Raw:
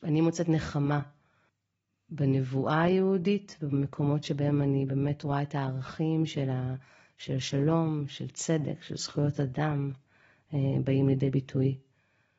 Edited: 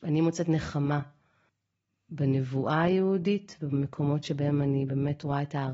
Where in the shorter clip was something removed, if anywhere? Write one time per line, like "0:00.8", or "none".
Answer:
none